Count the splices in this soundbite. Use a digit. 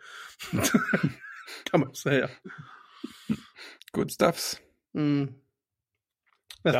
1